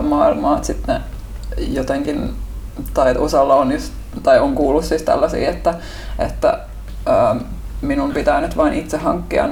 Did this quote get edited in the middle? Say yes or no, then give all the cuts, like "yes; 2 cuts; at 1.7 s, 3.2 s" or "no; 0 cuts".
no; 0 cuts